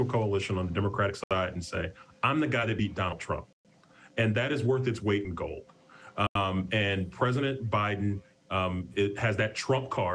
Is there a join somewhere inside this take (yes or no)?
no